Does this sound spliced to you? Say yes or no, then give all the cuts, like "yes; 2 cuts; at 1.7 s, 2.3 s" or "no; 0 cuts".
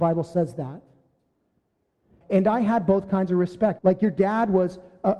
yes; 2 cuts; at 2.2 s, 3.8 s